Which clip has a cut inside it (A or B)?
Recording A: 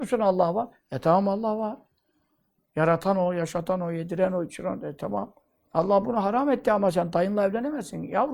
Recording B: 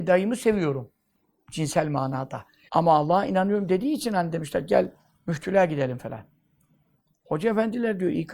B